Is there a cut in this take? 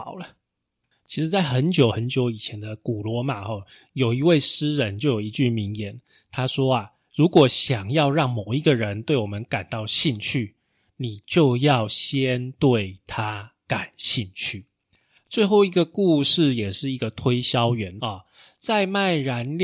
yes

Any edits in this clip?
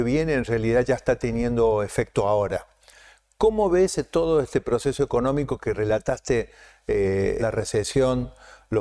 yes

